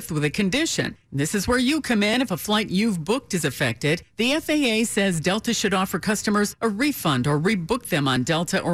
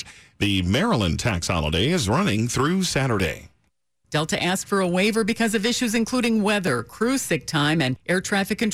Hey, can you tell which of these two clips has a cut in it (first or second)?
second